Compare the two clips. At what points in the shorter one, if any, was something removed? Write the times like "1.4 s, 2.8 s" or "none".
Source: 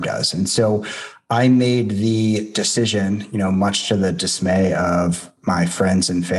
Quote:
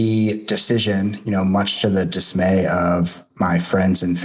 none